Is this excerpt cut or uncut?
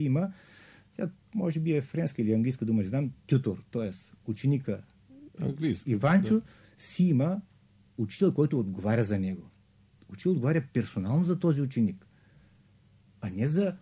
uncut